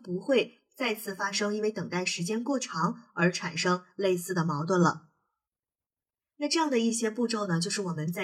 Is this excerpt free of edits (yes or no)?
yes